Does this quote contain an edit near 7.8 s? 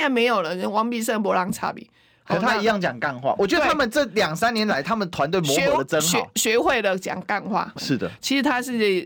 yes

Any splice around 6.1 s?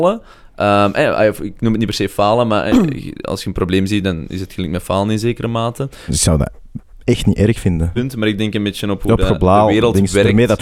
yes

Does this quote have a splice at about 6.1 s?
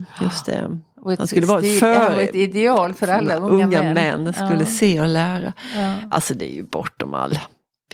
no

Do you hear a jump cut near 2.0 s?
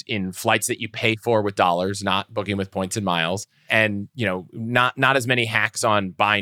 no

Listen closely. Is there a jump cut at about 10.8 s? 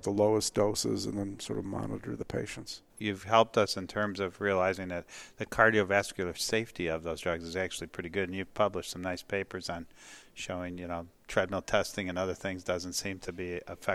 no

